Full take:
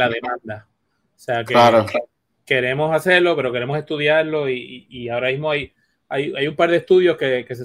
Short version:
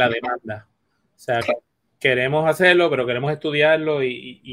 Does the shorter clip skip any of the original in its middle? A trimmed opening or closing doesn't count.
yes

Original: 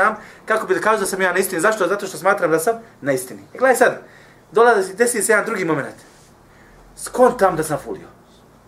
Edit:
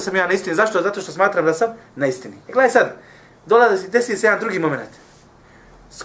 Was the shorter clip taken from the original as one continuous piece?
yes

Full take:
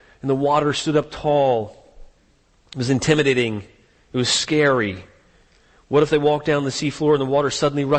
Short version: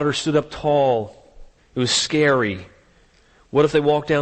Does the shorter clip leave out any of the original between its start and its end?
yes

